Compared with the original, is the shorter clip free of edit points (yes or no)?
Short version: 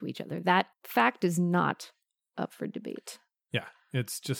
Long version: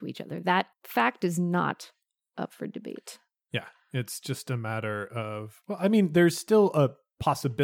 yes